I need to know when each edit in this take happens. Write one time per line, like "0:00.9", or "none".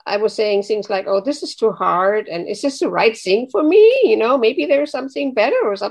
none